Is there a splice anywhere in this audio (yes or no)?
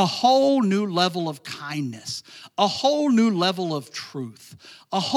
no